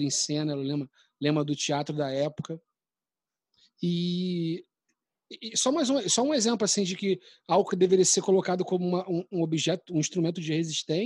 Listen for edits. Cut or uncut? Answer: uncut